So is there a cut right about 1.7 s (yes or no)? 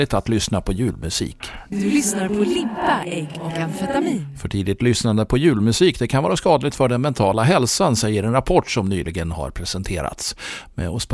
yes